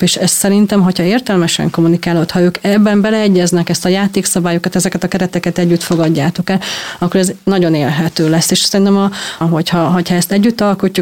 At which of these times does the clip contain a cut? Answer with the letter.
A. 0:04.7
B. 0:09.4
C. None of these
B